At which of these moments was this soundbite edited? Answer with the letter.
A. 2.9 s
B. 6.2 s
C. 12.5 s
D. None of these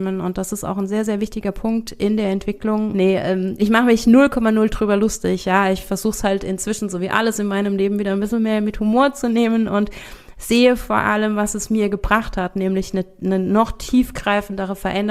A